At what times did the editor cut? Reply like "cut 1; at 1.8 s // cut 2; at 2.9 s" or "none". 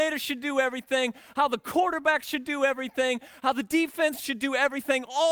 none